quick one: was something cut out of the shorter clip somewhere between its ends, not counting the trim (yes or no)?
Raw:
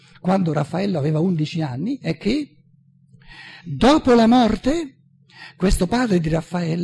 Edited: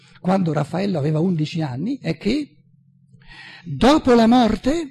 no